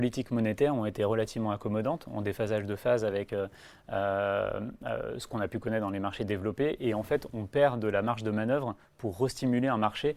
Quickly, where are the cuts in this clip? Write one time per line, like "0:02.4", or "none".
none